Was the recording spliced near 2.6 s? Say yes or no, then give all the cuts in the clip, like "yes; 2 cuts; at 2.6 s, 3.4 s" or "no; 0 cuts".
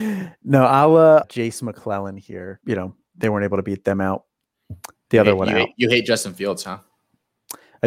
yes; 2 cuts; at 1.2 s, 2.6 s